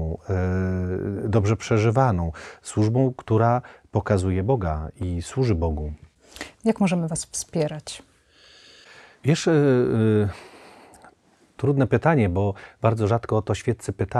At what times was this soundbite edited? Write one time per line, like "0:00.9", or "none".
0:06.5